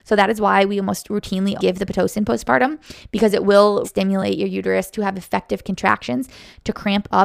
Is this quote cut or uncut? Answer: cut